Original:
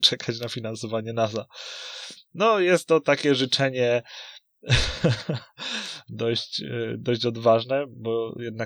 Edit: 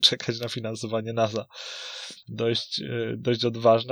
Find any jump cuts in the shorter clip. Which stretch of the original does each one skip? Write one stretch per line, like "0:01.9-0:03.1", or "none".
0:02.2-0:06.0